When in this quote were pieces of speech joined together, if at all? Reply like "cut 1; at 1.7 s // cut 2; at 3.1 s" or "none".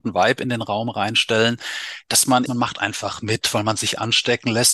cut 1; at 2.5 s